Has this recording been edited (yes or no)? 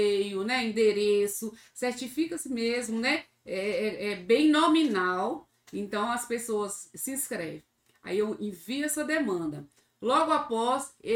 no